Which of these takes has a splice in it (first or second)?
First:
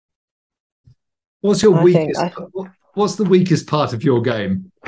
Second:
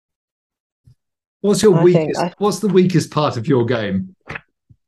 second